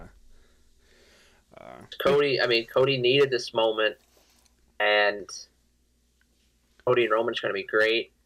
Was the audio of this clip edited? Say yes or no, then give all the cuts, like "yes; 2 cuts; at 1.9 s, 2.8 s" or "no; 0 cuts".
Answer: no; 0 cuts